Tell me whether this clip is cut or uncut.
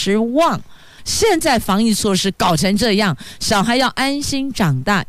cut